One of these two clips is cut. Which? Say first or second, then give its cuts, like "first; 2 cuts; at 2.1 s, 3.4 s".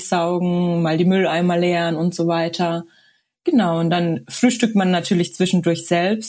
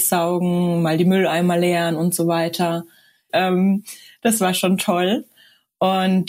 second; 1 cut; at 3.3 s